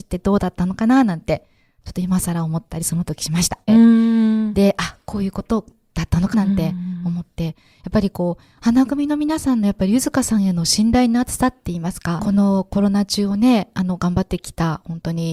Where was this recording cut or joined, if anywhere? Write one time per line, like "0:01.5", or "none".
0:03.7
0:06.3
0:12.2